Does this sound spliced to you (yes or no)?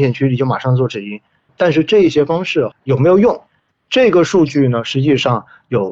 yes